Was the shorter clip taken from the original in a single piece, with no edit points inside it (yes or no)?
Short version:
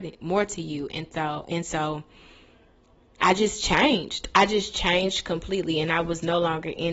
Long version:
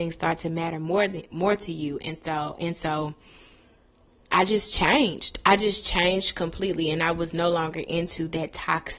yes